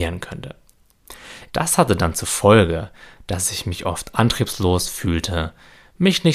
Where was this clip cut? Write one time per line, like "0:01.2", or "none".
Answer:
0:01.5